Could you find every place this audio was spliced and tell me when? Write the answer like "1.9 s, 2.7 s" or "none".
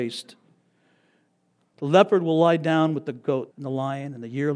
1.7 s, 3.5 s